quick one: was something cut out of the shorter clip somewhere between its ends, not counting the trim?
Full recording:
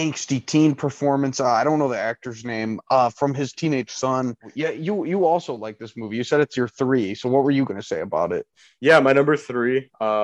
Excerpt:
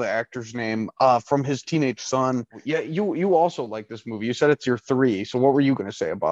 no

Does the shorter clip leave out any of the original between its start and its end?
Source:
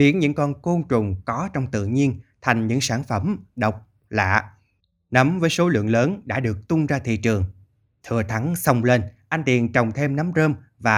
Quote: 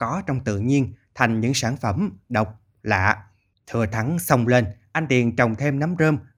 yes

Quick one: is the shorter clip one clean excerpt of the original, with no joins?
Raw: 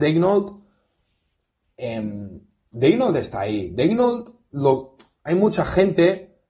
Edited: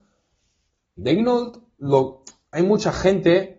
no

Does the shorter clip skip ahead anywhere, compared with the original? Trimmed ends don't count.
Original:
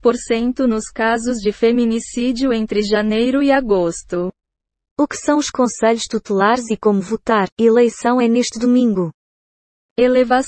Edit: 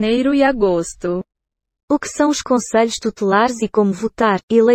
no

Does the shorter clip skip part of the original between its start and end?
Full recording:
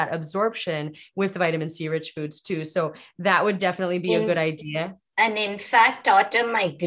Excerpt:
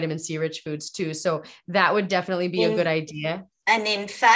no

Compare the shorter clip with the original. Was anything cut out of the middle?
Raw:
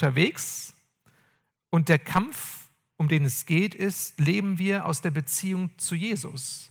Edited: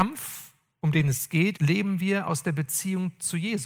yes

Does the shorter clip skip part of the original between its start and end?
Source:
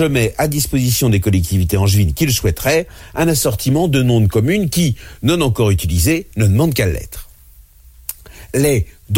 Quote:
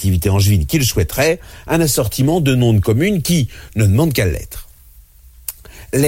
yes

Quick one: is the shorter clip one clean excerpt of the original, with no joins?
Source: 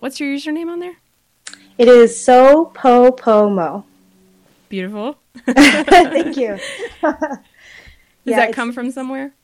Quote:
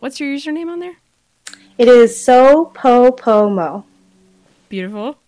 yes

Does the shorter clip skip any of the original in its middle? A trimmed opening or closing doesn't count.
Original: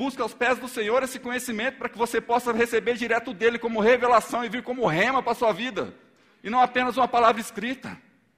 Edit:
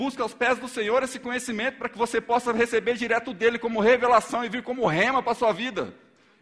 no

